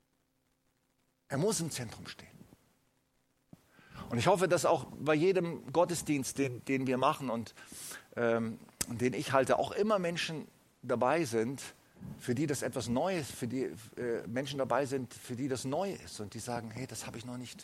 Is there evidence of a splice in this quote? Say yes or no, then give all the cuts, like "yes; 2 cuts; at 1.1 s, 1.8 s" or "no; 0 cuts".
no; 0 cuts